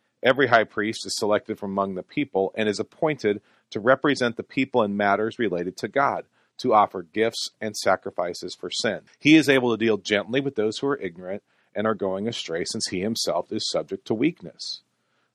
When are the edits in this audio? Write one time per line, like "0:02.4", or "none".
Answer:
0:09.1